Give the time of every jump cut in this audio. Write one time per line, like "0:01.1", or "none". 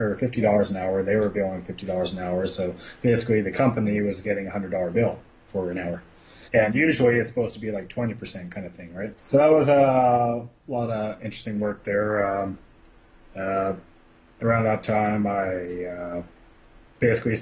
0:06.5
0:09.2